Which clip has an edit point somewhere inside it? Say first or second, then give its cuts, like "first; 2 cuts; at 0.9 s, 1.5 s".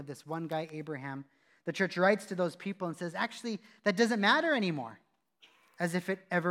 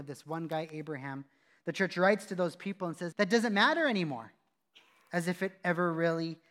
second; 1 cut; at 3.1 s